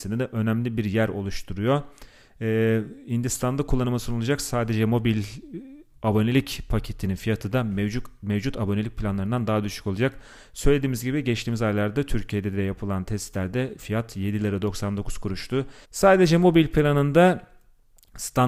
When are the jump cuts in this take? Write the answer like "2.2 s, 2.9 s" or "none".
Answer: 15.8 s